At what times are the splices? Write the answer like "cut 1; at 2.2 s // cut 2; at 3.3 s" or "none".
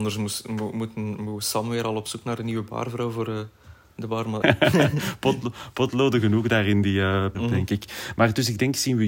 cut 1; at 4.4 s // cut 2; at 7.3 s